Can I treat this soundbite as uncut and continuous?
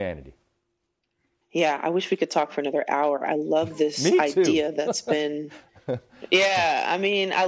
yes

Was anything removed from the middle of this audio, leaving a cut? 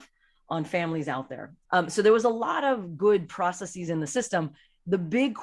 yes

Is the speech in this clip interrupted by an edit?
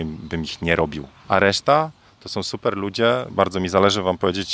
yes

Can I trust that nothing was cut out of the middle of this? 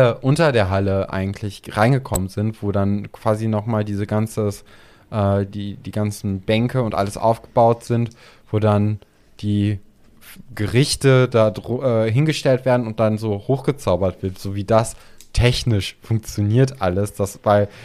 no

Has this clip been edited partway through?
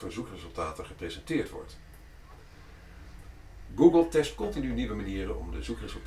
yes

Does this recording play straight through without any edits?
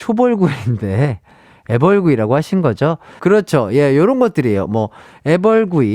no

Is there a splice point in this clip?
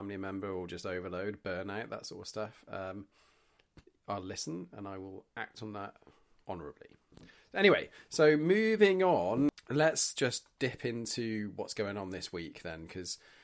no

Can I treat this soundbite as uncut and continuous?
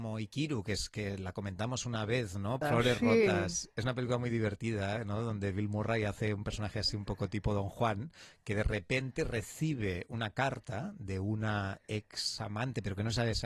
no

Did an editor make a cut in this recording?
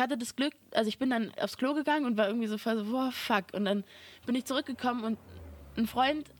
no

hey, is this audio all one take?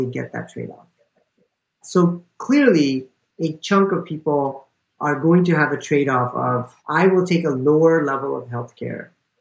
no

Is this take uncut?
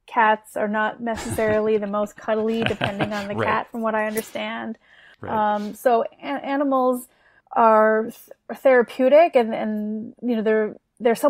yes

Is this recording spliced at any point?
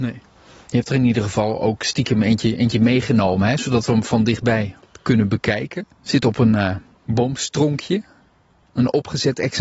yes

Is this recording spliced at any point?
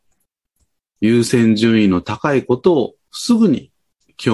yes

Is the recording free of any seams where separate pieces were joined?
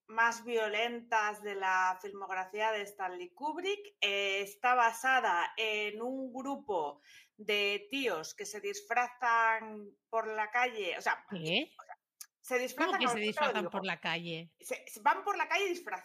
no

